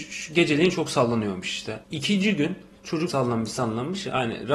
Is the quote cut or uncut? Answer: cut